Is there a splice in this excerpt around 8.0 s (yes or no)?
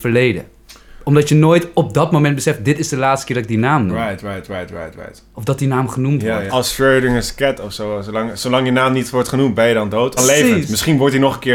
no